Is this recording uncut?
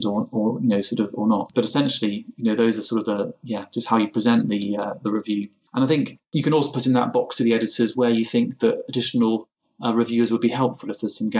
yes; 0 cuts

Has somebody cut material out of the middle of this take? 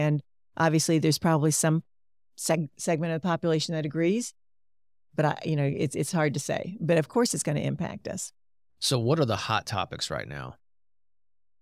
no; 0 cuts

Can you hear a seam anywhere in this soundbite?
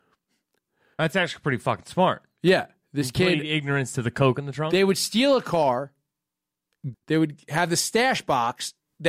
yes; 1 cut; at 6.9 s

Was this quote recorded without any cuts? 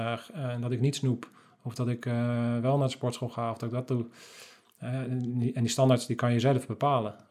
yes; 0 cuts

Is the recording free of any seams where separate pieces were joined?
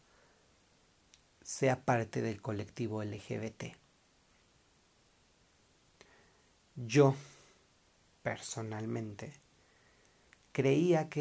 yes; 0 cuts

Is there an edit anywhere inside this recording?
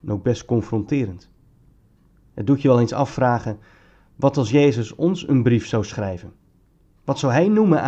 no; 0 cuts

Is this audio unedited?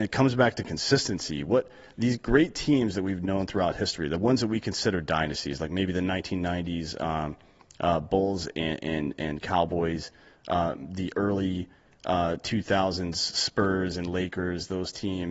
yes; 0 cuts

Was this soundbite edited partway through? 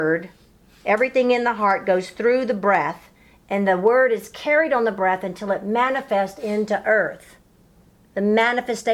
no; 0 cuts

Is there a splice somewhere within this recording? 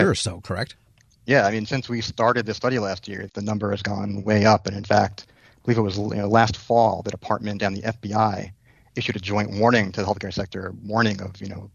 no; 0 cuts

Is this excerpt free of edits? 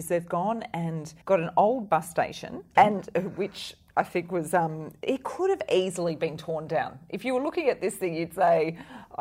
no; 2 cuts; at 1.2 s, 2.8 s

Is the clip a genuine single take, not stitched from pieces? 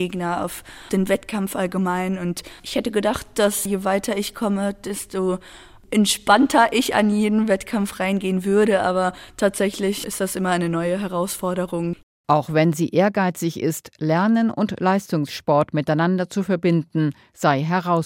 yes; 0 cuts

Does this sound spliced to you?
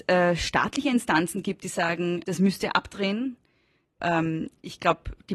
yes; 2 cuts; at 2.2 s, 4.0 s

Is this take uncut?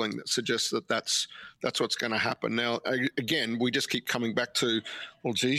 yes; 0 cuts

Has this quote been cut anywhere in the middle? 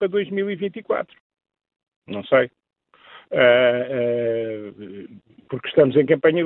no; 0 cuts

